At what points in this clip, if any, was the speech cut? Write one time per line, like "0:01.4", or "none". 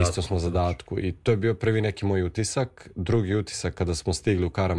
none

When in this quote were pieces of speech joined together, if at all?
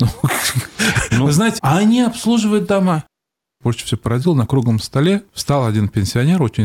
0:01.6

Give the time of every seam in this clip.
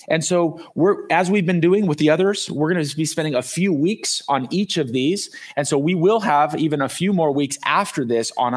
none

